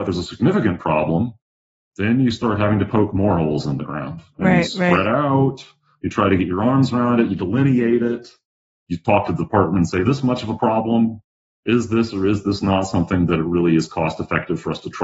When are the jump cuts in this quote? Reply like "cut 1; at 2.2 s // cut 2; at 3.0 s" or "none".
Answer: none